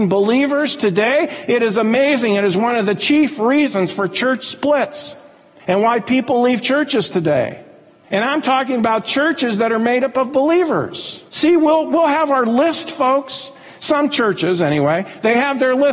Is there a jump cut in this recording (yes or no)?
yes